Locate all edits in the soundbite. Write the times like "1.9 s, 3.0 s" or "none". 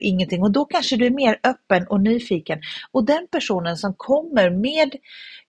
none